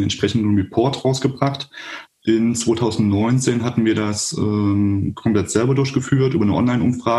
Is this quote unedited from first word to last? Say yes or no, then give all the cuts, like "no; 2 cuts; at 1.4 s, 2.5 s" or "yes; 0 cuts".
no; 1 cut; at 2.0 s